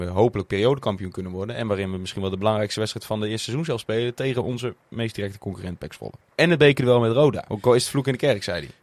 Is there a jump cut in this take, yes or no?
yes